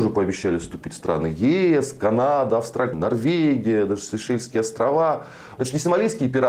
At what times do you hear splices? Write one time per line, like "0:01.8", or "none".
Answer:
0:02.9
0:05.6